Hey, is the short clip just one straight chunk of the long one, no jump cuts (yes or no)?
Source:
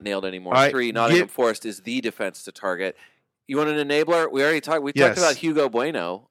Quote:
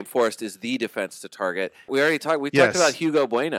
no